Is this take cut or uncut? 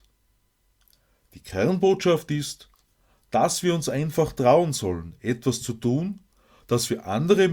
uncut